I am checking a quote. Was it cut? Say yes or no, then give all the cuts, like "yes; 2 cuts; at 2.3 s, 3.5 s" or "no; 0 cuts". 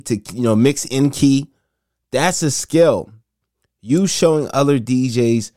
no; 0 cuts